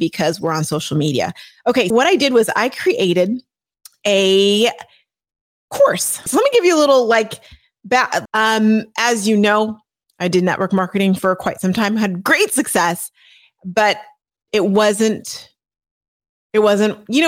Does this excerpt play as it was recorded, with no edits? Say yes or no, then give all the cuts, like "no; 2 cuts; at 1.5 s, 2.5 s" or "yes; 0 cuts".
no; 3 cuts; at 1.9 s, 6.3 s, 8.3 s